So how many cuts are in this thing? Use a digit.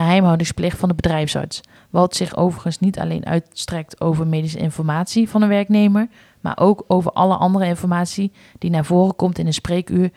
1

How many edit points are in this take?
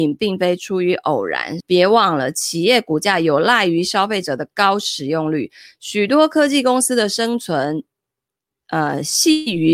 1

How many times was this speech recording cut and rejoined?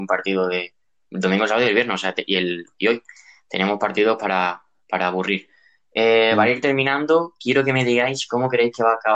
0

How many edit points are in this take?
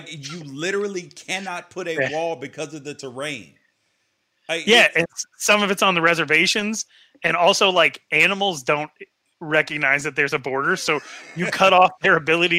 0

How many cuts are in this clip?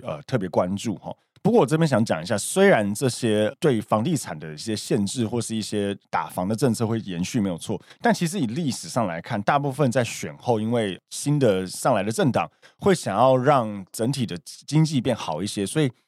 1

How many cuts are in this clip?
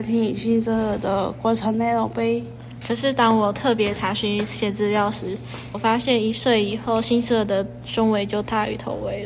2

